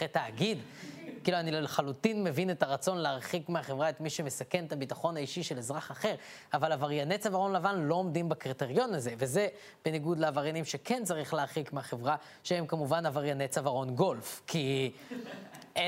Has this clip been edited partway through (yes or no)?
no